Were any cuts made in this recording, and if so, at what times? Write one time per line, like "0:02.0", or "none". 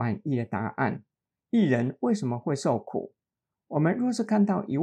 0:01.4